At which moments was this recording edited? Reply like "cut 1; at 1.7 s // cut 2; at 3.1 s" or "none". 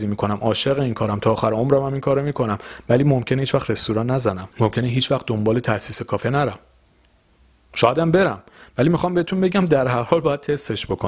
cut 1; at 4.5 s

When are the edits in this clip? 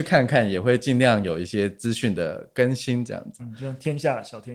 cut 1; at 3.4 s

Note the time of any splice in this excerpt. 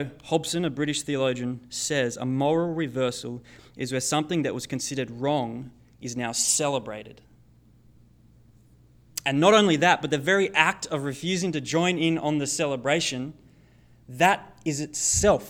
none

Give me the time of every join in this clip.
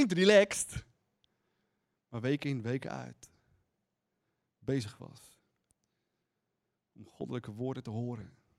none

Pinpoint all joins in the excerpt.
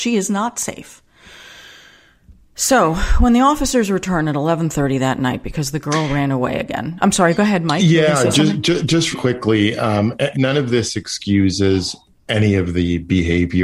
cut 1; at 9.1 s // cut 2; at 10.3 s

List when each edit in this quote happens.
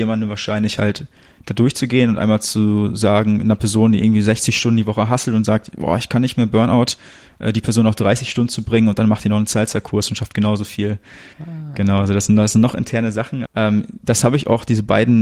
cut 1; at 11.3 s // cut 2; at 13.5 s

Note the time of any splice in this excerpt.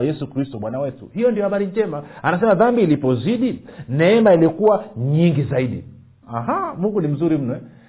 cut 1; at 6.2 s

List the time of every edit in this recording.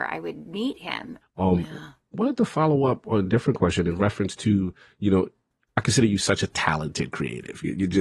cut 1; at 1.2 s

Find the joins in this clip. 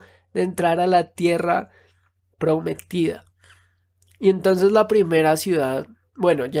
none

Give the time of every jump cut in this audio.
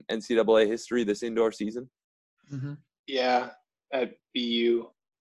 none

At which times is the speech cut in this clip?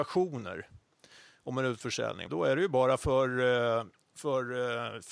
cut 1; at 2.3 s

